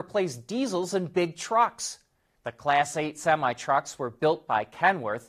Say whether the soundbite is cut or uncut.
cut